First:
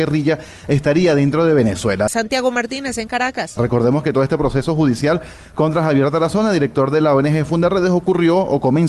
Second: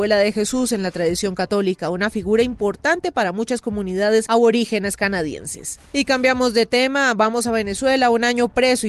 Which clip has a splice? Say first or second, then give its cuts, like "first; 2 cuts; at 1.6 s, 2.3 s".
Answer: first; 2 cuts; at 2.1 s, 3.6 s